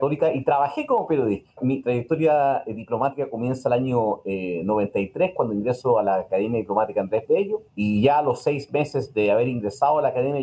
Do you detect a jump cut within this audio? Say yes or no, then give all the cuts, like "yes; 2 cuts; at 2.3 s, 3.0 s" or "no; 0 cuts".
yes; 1 cut; at 7.7 s